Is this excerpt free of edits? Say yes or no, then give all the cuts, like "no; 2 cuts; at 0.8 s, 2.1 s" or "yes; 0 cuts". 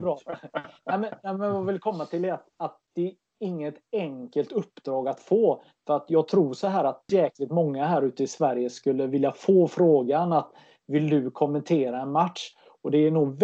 no; 1 cut; at 7.1 s